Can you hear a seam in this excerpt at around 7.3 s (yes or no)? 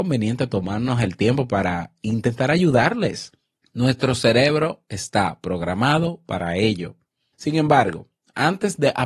yes